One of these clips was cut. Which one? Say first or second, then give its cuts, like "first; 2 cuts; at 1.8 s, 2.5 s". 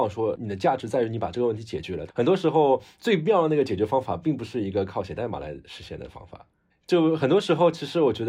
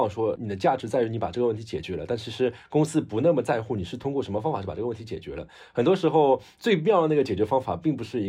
first; 2 cuts; at 2.1 s, 6.7 s